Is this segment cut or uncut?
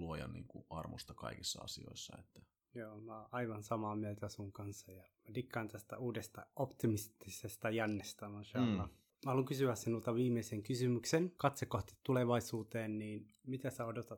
uncut